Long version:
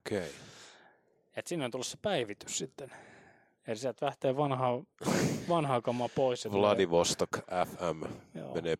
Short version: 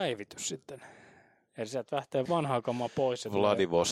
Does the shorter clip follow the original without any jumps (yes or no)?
no